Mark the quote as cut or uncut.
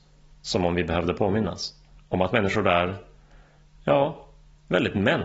uncut